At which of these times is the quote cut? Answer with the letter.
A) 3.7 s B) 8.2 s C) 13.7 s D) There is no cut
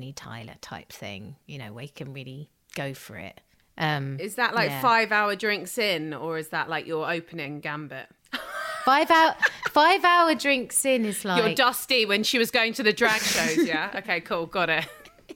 B